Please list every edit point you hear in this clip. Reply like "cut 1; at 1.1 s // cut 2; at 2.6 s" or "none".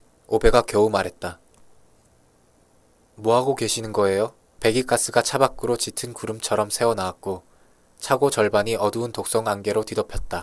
cut 1; at 4.6 s